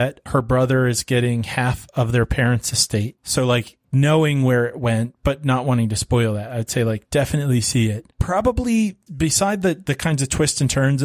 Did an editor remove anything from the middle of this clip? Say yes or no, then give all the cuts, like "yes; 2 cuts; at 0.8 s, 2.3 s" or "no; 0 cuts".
yes; 1 cut; at 3.2 s